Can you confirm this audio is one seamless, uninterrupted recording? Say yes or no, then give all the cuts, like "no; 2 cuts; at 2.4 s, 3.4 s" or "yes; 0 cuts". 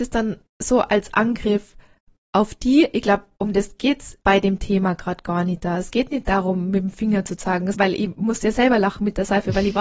no; 2 cuts; at 4.2 s, 7.7 s